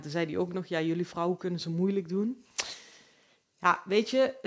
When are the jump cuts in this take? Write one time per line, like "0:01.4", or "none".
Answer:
none